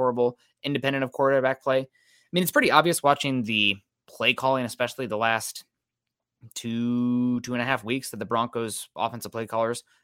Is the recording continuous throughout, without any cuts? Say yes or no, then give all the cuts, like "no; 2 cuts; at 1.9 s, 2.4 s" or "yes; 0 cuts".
yes; 0 cuts